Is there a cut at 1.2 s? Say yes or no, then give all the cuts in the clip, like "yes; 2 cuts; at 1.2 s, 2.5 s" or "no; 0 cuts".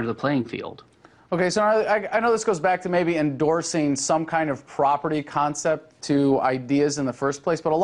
no; 0 cuts